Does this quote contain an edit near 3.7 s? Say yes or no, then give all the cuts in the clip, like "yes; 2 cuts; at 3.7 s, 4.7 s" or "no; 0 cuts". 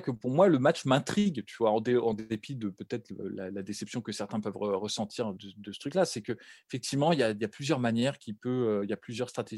no; 1 cut; at 5.4 s